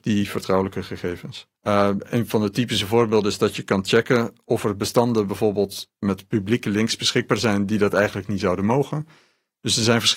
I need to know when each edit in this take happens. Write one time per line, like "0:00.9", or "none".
0:01.5